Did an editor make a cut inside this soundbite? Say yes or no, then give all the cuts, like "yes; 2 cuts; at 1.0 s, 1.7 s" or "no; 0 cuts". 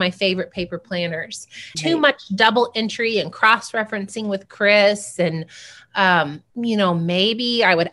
yes; 2 cuts; at 1.7 s, 6.5 s